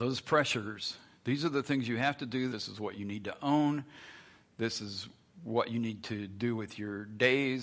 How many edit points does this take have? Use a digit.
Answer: 1